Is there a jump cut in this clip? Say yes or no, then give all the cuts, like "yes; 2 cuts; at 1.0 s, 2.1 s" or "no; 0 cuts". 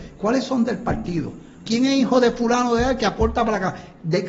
yes; 1 cut; at 1.6 s